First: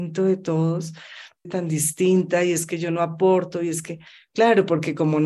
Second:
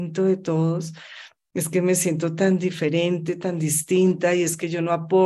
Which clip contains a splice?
first; 1 cut; at 1.4 s

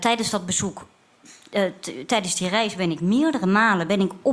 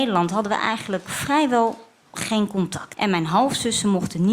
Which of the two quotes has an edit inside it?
second; 1 cut; at 2.9 s

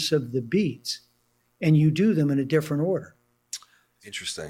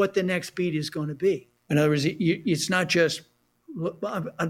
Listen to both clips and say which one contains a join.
second; 1 cut; at 1.6 s

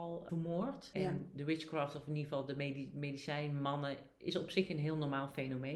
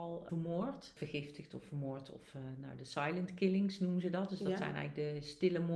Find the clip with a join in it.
first; 1 cut; at 0.9 s

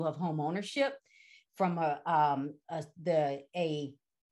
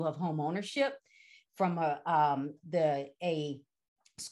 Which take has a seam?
second; 1 cut; at 2.6 s

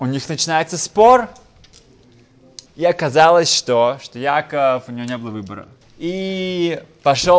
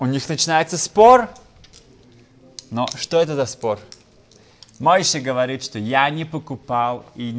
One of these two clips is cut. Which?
first; 2 cuts; at 2.7 s, 5.8 s

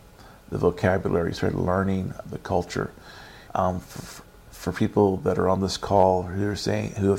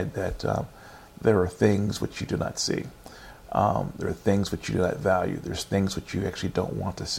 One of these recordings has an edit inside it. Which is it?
first; 2 cuts; at 2.2 s, 3.5 s

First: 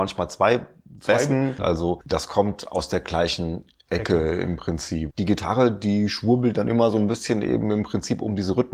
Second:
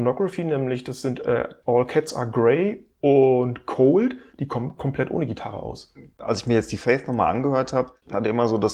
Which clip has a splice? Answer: first; 2 cuts; at 1.6 s, 5.1 s

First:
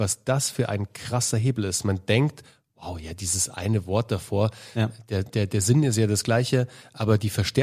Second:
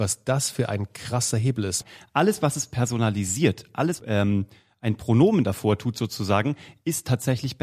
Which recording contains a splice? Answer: second; 2 cuts; at 1.8 s, 4.0 s

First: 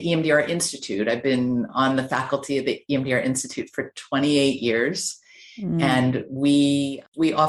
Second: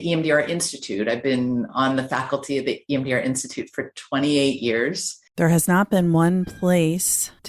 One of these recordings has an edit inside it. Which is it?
second; 1 cut; at 5.3 s

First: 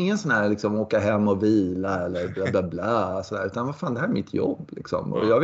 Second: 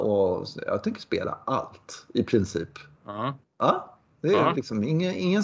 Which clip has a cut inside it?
second; 1 cut; at 2.9 s

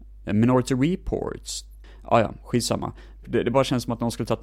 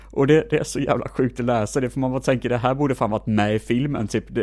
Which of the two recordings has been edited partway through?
first; 1 cut; at 3.2 s

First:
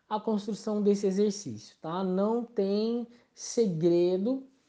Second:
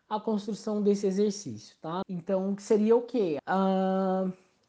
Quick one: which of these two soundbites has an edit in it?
second; 2 cuts; at 2.0 s, 3.4 s

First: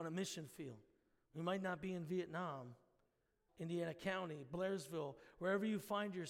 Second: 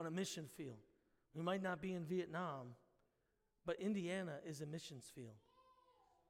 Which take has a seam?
first; 1 cut; at 3.5 s

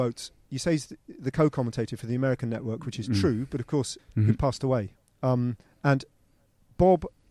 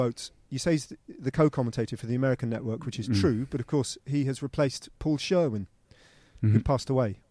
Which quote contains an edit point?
first; 1 cut; at 4.0 s

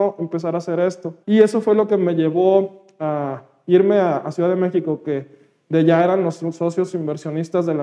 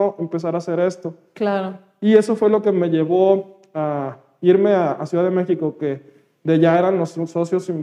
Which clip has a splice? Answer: first; 1 cut; at 1.2 s

